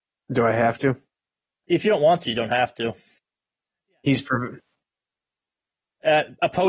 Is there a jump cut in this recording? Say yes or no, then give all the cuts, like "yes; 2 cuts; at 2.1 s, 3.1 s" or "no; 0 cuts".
no; 0 cuts